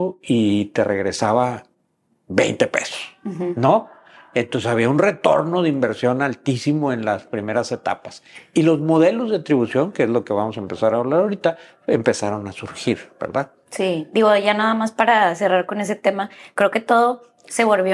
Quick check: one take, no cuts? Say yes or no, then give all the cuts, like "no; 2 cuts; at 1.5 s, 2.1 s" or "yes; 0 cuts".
yes; 0 cuts